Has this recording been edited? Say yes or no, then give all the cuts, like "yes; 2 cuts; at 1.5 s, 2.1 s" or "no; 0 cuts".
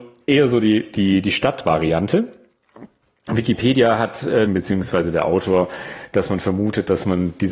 yes; 1 cut; at 4.5 s